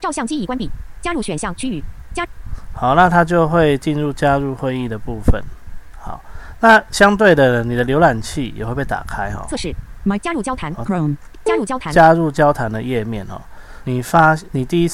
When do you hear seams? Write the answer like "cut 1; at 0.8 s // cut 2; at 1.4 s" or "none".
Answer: cut 1; at 10.9 s // cut 2; at 13.8 s